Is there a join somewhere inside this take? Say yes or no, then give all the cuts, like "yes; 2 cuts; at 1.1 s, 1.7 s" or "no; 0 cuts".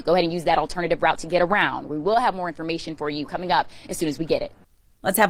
no; 0 cuts